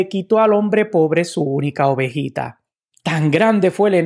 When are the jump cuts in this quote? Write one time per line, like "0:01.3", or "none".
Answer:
0:03.0